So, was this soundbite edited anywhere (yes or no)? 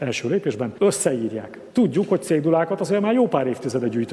yes